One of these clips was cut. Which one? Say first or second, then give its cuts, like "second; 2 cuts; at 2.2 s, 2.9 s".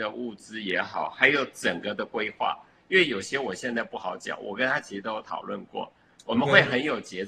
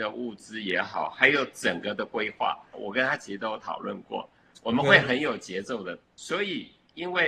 second; 2 cuts; at 2.7 s, 6.0 s